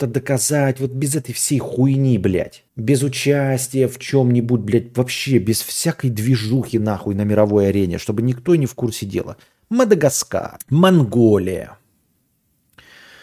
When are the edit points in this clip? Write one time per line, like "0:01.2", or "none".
0:02.7